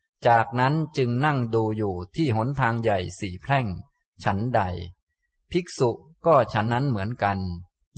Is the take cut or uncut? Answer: cut